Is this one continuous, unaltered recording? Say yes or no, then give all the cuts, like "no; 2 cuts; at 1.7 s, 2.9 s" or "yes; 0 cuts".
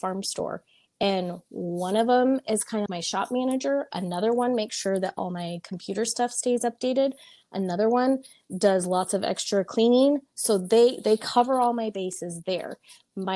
no; 1 cut; at 2.9 s